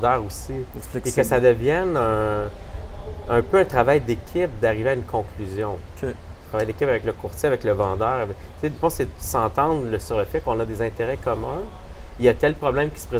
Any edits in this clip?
yes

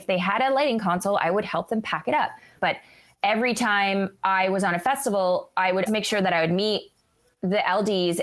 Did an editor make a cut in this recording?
yes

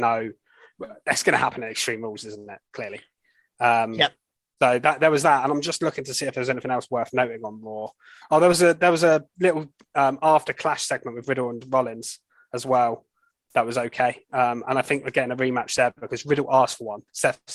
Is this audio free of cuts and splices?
yes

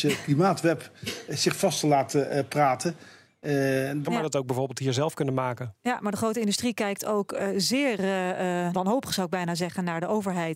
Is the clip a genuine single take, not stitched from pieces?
no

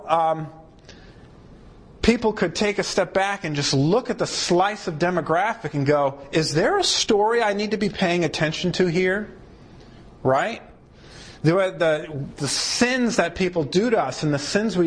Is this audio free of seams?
no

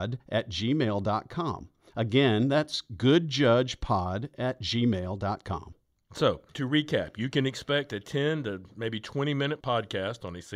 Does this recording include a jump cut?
no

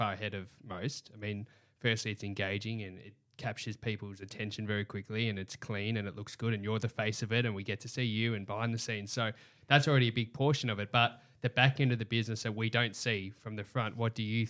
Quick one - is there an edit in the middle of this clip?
no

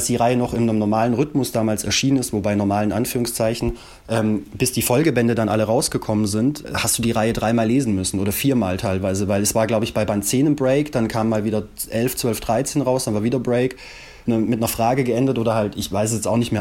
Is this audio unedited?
no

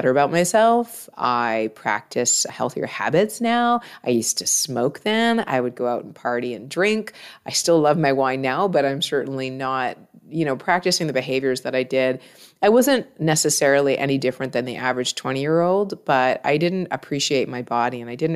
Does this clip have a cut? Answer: no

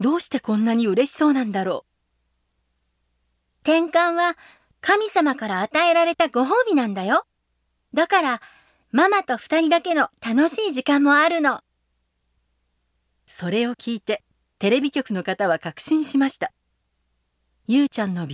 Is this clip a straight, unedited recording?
yes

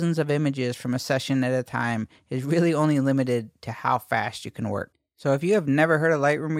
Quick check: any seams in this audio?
no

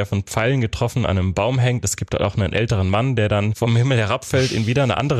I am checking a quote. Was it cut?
no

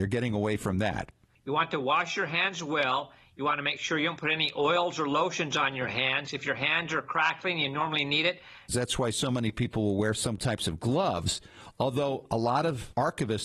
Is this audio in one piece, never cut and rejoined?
no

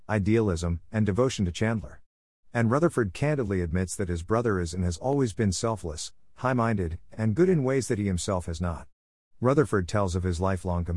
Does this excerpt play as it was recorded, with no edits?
yes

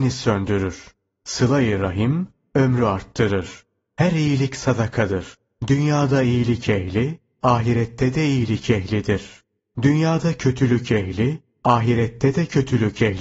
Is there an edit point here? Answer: no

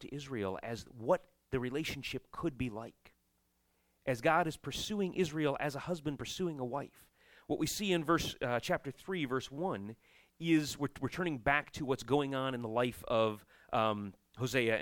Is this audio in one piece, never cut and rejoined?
yes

